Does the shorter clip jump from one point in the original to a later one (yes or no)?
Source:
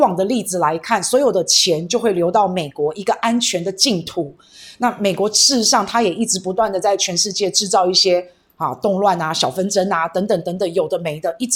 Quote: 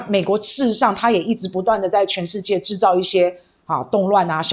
no